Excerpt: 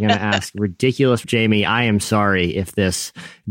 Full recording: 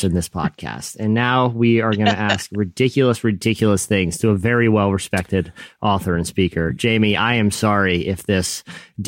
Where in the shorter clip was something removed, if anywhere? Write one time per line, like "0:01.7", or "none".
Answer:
0:01.2